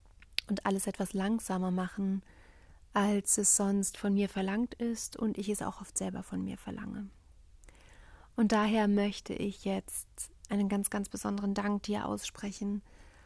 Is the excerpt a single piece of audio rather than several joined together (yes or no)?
yes